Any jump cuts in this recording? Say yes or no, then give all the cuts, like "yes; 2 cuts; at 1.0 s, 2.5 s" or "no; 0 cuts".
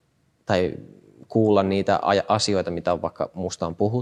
no; 0 cuts